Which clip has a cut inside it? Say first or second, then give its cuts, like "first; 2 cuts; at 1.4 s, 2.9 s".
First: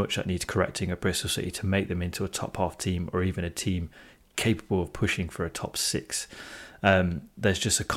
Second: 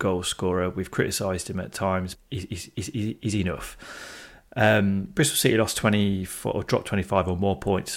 second; 1 cut; at 2.1 s